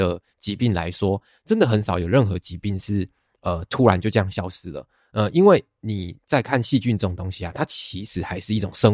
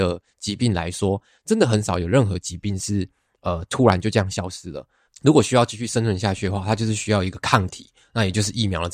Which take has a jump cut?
second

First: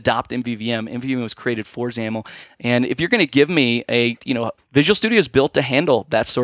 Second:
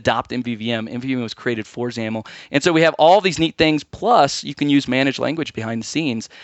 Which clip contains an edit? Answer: first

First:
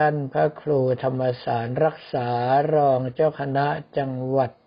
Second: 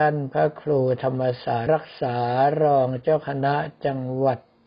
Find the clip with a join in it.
second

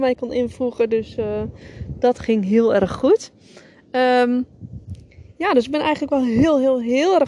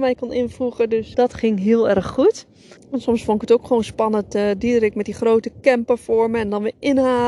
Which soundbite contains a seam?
second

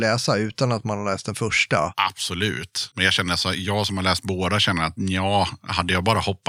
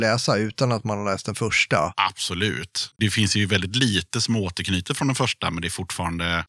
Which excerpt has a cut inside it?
second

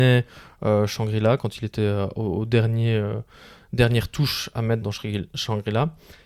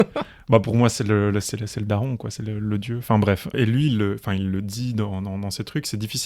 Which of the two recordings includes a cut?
first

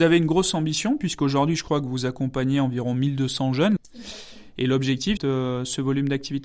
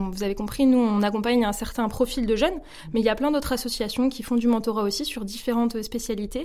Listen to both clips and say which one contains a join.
first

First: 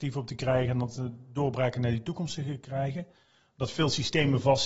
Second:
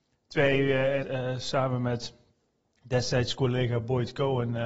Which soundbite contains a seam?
second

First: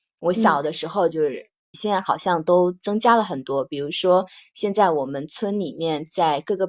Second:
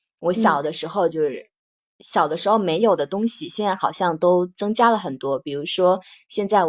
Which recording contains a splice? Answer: first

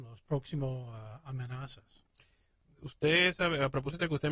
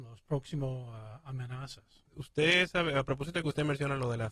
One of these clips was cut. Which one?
second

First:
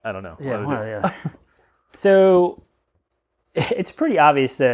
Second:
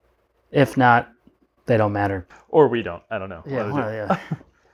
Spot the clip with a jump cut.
second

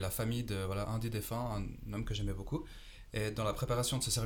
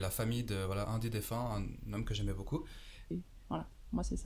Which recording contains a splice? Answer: second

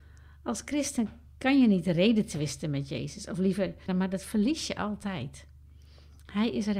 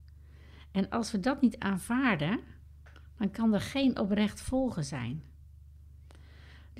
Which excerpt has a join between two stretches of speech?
first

